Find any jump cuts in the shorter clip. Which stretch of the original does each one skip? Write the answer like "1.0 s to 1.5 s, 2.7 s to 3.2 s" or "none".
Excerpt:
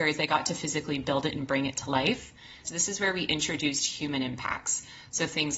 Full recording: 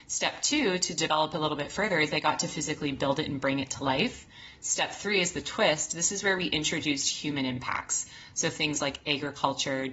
4.6 s to 5.9 s